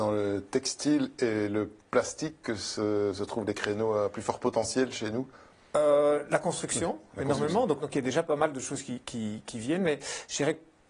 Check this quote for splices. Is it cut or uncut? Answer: cut